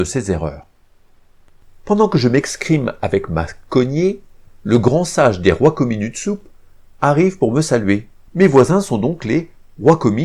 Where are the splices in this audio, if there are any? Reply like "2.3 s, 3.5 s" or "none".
8.3 s

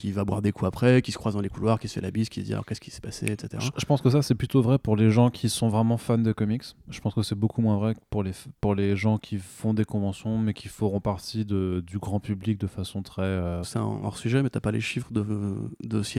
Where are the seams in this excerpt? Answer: 13.6 s

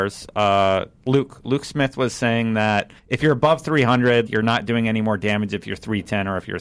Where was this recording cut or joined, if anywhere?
3.0 s, 4.3 s

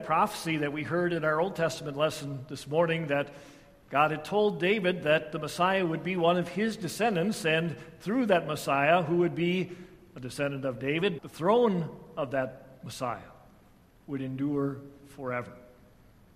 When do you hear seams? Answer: 11.2 s

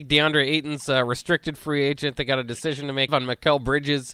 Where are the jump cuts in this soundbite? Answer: 3.1 s

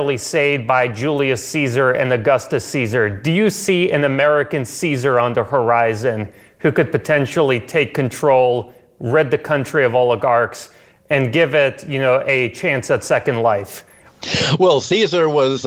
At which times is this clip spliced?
none

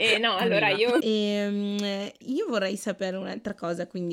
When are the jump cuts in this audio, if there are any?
1.0 s

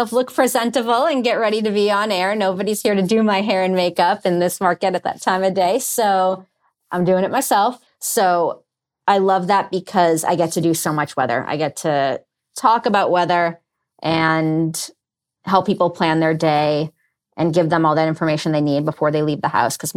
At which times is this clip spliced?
7.9 s

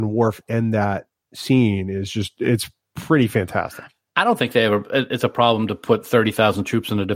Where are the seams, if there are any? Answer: none

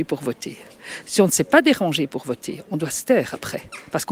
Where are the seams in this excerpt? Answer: none

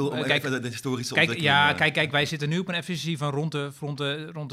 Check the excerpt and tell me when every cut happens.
none

